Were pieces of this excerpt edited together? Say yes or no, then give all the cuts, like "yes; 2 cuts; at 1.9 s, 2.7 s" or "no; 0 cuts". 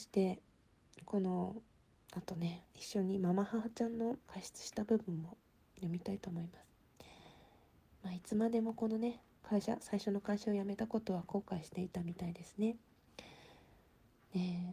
yes; 2 cuts; at 2.7 s, 4.3 s